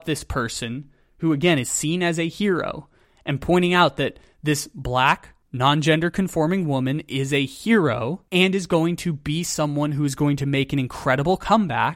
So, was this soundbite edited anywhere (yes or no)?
yes